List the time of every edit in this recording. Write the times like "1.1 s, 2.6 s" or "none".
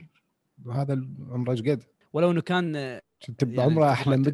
2.0 s